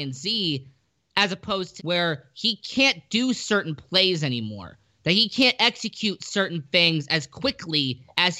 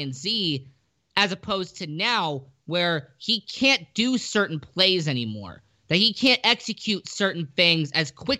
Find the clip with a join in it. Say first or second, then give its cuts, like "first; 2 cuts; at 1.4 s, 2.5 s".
first; 1 cut; at 1.8 s